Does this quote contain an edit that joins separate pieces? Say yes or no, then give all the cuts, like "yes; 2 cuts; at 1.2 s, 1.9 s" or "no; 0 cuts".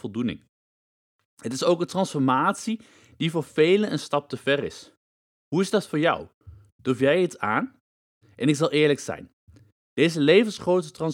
yes; 1 cut; at 8.2 s